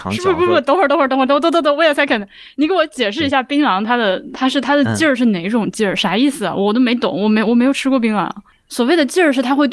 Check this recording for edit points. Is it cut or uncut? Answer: uncut